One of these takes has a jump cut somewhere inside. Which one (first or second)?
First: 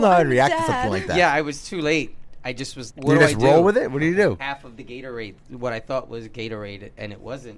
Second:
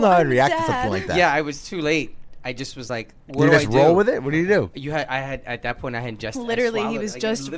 first